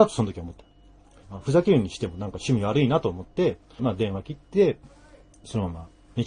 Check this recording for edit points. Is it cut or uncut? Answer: cut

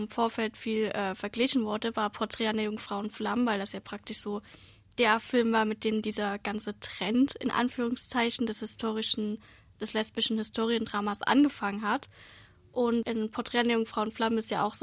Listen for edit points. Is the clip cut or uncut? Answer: uncut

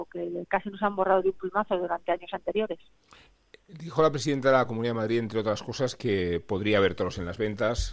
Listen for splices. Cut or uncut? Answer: uncut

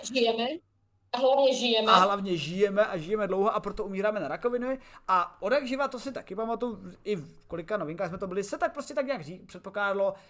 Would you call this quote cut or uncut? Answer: uncut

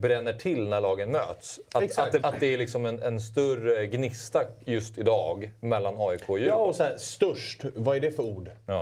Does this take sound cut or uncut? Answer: cut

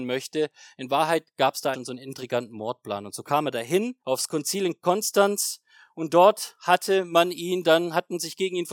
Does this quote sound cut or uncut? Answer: cut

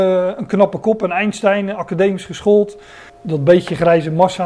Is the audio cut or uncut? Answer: cut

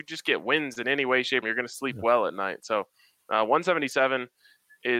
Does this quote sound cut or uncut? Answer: cut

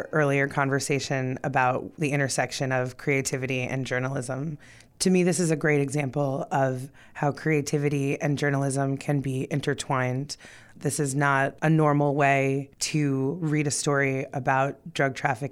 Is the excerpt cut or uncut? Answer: uncut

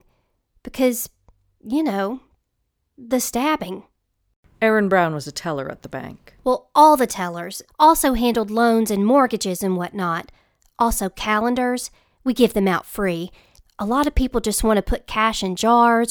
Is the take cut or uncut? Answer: cut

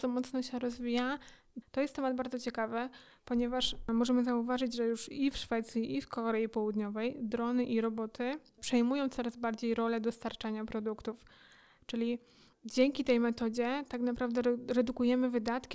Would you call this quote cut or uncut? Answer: cut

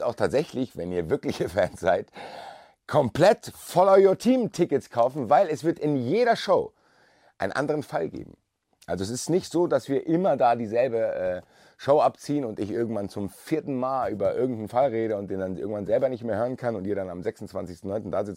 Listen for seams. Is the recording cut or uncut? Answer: uncut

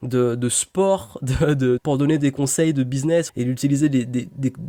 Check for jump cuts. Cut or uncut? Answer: cut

